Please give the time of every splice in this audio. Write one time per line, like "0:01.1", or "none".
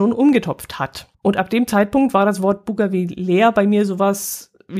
0:01.1